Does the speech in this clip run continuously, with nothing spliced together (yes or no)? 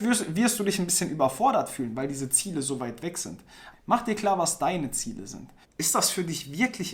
no